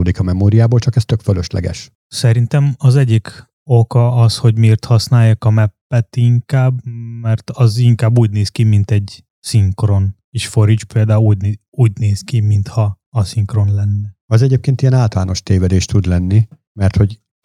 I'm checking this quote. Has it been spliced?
no; 0 cuts

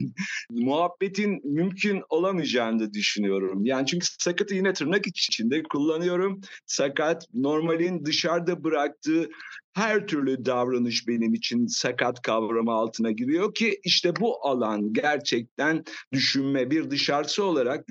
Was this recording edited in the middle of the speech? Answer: no; 0 cuts

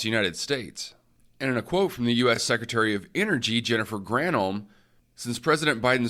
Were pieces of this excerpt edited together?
no; 0 cuts

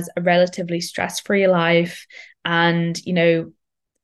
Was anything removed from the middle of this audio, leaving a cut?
no; 0 cuts

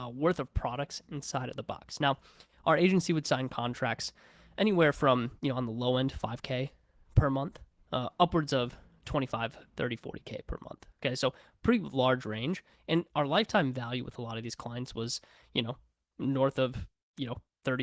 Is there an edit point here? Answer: no; 0 cuts

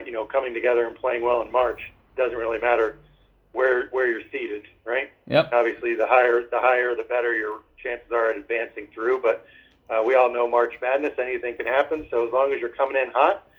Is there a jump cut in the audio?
no; 0 cuts

